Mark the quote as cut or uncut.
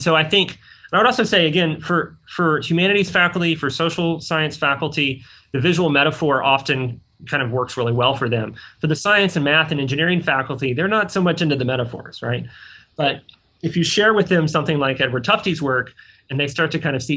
uncut